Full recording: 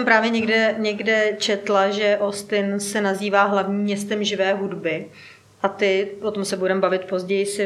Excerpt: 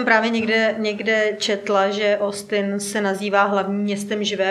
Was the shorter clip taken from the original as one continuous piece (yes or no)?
yes